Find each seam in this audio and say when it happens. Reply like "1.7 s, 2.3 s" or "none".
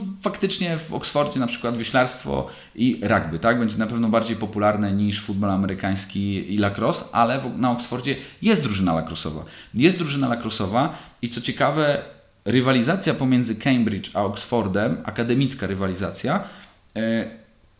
none